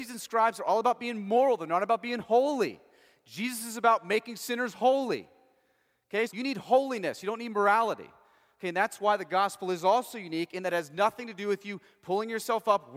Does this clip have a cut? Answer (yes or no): yes